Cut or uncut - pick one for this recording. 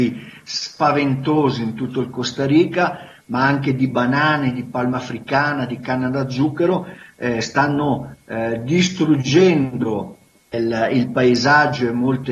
cut